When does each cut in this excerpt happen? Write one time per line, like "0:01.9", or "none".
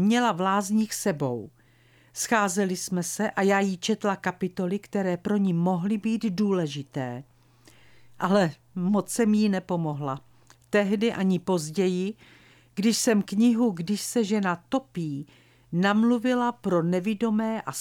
none